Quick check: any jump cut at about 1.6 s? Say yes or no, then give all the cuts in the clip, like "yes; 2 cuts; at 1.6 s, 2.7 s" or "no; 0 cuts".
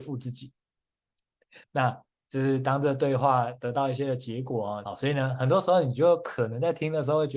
yes; 2 cuts; at 1.6 s, 4.8 s